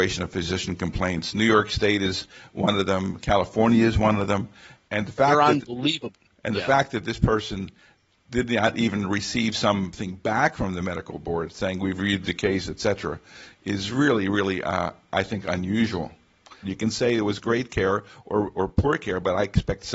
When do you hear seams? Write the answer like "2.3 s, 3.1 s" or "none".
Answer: 4.9 s, 16.6 s